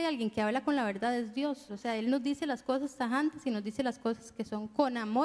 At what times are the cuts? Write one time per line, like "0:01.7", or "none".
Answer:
0:01.7